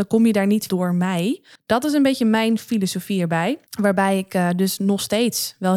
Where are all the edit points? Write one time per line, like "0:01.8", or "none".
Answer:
0:01.6
0:03.7